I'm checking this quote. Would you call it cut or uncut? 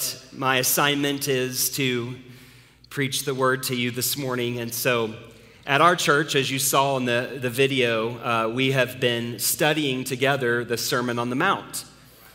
uncut